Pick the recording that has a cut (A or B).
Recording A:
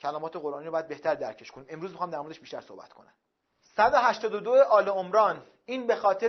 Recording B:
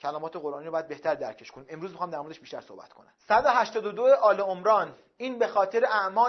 B